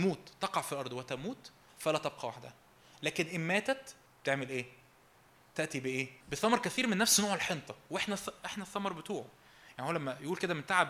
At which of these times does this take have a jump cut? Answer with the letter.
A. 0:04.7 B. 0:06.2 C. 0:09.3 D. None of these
B